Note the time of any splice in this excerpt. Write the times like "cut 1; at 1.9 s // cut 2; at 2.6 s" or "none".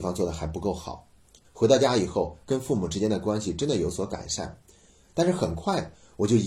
cut 1; at 1.4 s